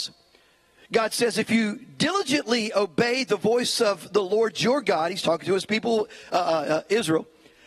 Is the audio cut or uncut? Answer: uncut